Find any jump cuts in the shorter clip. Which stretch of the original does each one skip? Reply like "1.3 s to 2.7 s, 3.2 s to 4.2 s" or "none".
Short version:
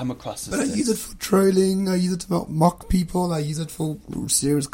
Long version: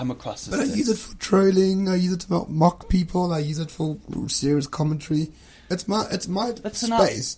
none